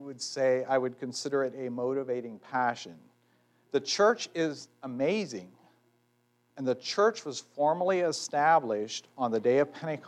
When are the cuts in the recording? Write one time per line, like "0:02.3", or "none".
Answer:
0:06.5